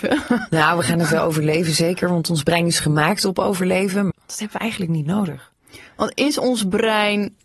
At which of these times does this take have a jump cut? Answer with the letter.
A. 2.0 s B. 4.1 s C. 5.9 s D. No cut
B